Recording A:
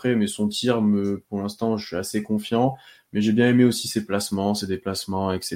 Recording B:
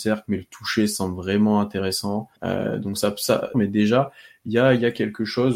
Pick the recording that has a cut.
B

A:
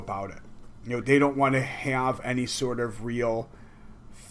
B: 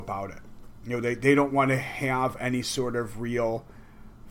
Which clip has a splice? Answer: A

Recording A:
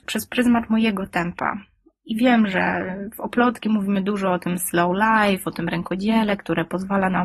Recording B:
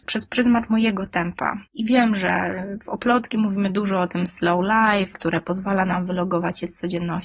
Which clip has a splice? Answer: B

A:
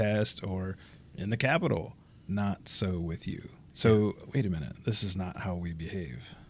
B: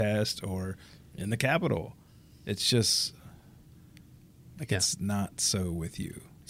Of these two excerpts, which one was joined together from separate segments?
A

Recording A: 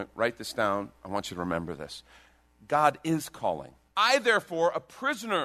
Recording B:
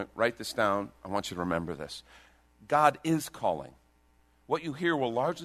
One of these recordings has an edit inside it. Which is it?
A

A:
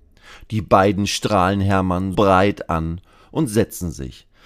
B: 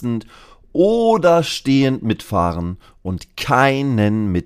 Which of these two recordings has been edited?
A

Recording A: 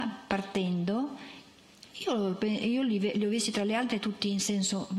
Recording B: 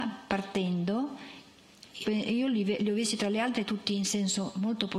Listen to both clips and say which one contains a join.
B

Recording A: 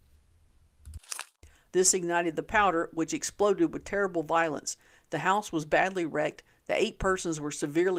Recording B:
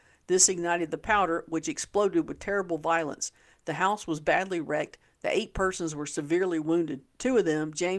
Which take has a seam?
A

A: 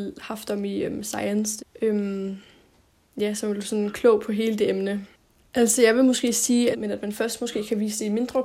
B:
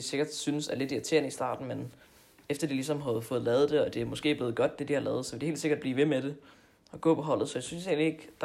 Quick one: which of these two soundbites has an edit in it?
A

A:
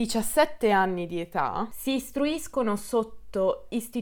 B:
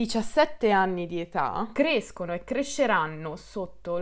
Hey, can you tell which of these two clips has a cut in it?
A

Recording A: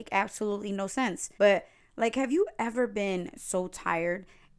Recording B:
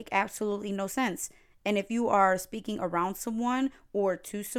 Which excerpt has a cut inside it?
A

